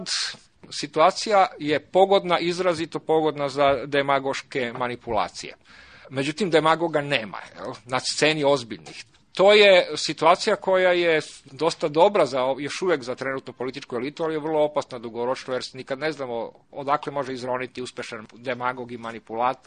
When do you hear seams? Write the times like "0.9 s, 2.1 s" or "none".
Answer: none